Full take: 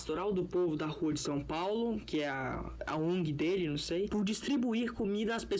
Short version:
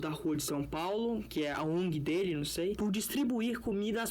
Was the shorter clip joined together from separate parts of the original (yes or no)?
yes